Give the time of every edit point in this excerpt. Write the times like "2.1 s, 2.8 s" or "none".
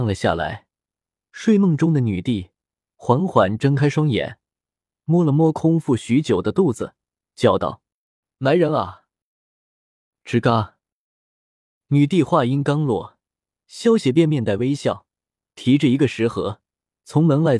none